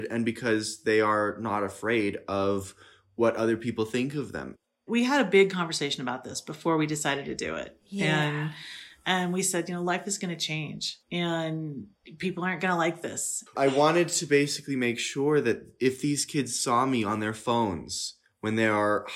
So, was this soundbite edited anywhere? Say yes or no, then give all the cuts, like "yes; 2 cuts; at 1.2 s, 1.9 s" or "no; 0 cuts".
yes; 2 cuts; at 11.0 s, 13.5 s